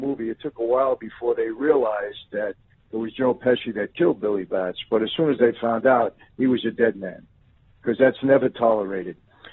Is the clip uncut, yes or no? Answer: yes